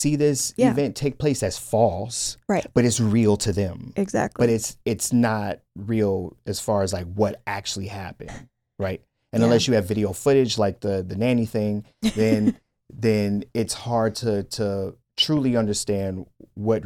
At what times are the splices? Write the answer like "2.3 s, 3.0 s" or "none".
15.0 s